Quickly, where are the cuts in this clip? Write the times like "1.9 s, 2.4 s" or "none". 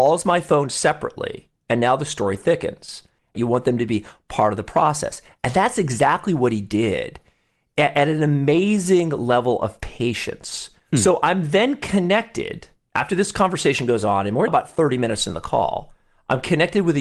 3.3 s, 10.8 s, 14.5 s